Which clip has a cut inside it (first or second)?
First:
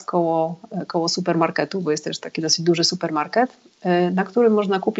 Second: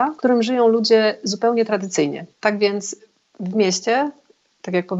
second